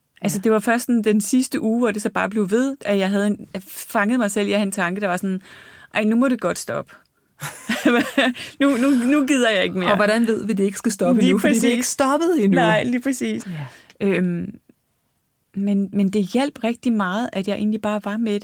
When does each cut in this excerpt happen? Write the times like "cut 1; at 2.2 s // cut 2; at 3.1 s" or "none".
cut 1; at 13.4 s